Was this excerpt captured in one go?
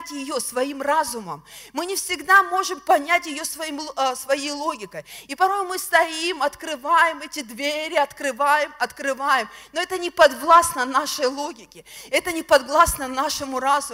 yes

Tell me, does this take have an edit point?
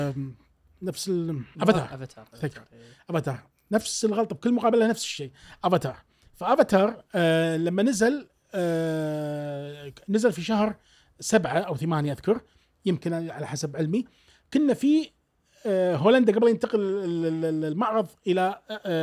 yes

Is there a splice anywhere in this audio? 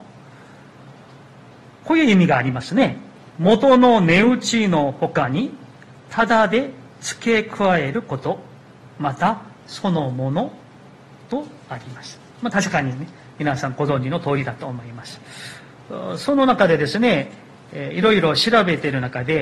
yes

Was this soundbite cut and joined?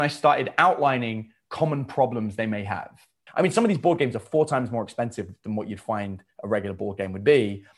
yes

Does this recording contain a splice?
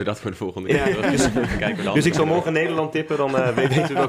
no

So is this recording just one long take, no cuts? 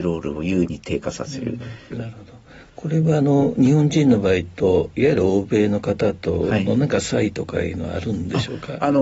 no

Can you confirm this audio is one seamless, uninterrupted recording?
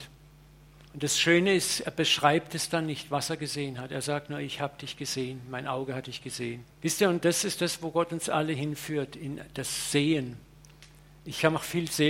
no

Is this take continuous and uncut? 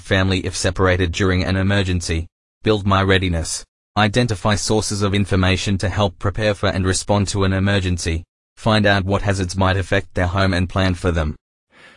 yes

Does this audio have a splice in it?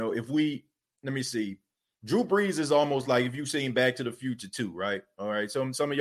no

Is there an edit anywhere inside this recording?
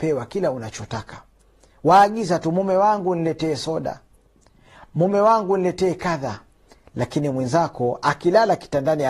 no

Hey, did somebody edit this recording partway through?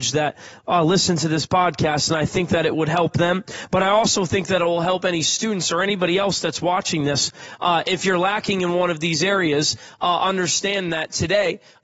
no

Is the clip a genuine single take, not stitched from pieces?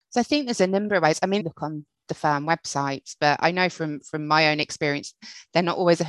no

